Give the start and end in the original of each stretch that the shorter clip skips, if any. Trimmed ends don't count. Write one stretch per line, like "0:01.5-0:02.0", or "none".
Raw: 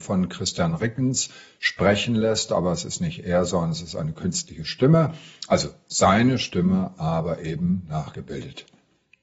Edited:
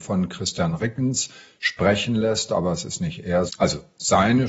0:03.5-0:05.4